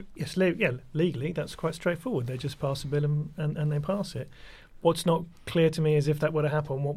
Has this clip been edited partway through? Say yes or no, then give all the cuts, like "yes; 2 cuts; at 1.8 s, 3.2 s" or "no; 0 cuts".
no; 0 cuts